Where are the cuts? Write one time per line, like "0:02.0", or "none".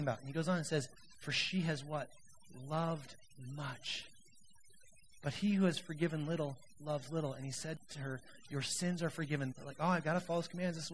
0:05.2
0:09.5